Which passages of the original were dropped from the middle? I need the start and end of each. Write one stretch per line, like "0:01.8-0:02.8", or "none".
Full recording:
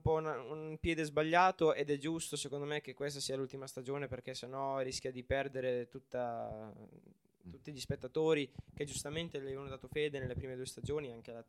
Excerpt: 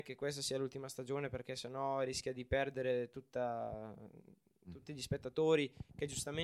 none